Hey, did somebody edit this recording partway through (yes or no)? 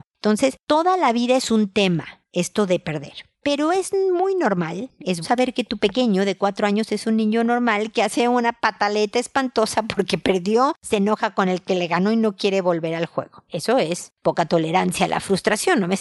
yes